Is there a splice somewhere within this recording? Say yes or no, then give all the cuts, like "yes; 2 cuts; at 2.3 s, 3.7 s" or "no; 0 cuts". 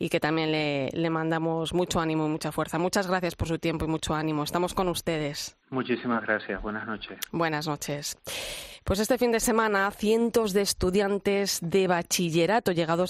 yes; 1 cut; at 5.6 s